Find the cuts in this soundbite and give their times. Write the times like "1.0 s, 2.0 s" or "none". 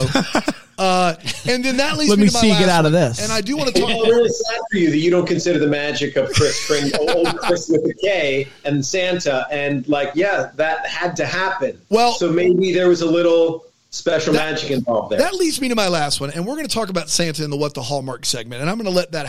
none